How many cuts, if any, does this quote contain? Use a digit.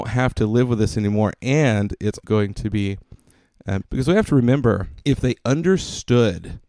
3